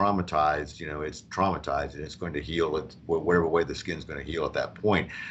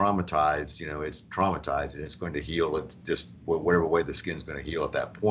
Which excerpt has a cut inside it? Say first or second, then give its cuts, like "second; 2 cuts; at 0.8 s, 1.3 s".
first; 1 cut; at 3.0 s